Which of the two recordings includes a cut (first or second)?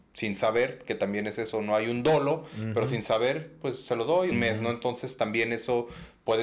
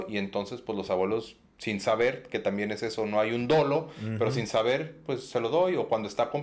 first